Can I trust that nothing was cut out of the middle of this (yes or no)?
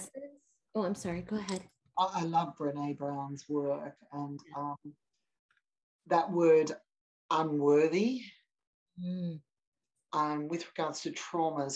yes